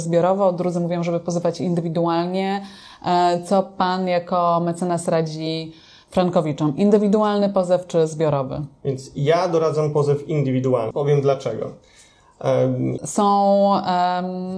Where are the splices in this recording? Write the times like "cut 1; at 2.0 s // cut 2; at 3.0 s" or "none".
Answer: cut 1; at 10.9 s // cut 2; at 13.0 s